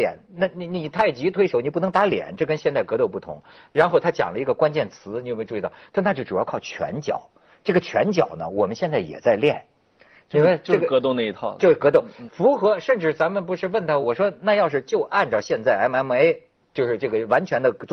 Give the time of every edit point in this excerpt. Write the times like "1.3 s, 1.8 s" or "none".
12.3 s, 14.0 s